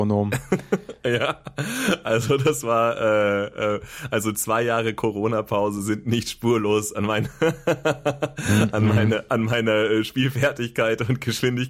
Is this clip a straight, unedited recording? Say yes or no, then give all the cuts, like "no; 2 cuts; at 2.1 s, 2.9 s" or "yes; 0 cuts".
yes; 0 cuts